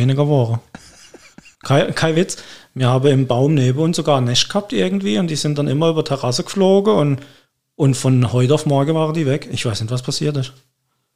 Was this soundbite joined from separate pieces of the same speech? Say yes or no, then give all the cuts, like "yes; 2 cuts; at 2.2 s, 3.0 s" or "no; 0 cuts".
no; 0 cuts